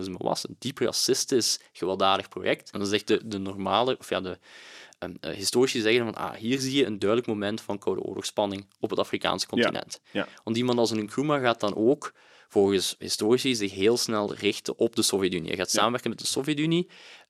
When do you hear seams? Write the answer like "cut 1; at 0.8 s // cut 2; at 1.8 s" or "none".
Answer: cut 1; at 2.7 s